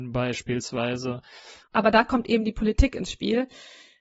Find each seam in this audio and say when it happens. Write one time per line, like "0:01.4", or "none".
0:01.6